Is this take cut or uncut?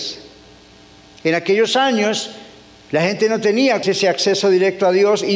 cut